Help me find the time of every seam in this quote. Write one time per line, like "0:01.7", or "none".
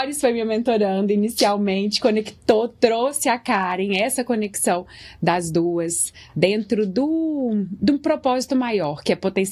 none